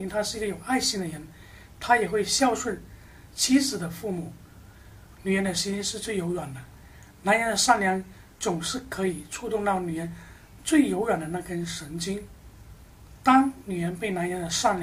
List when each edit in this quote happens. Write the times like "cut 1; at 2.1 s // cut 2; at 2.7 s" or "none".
cut 1; at 5.1 s